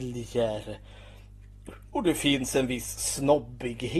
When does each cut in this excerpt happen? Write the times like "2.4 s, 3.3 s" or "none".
none